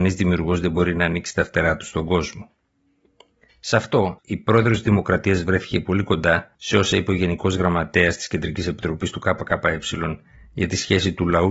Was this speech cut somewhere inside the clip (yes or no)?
yes